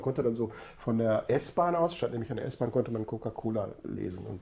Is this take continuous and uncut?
yes; 0 cuts

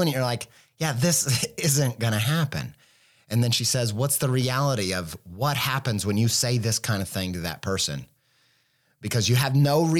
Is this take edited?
no; 0 cuts

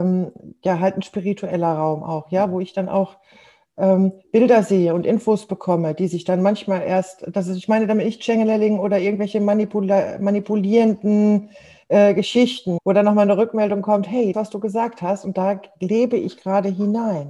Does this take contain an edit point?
yes; 2 cuts; at 12.8 s, 14.3 s

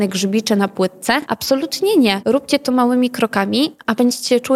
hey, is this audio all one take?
yes; 0 cuts

